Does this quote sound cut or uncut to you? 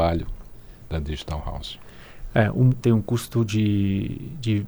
cut